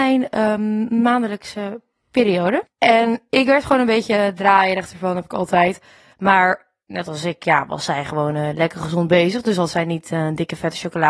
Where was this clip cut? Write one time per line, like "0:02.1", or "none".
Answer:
0:06.1